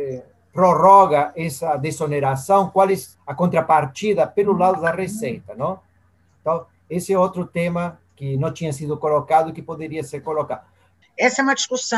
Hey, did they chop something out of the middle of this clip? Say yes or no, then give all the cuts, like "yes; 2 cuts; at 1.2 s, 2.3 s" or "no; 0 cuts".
yes; 2 cuts; at 3.1 s, 11.0 s